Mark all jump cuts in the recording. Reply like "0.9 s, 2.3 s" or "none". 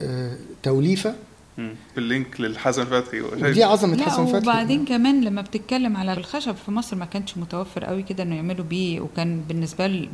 1.9 s, 6.1 s